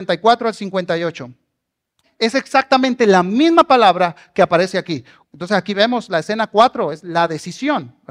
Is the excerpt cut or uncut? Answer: cut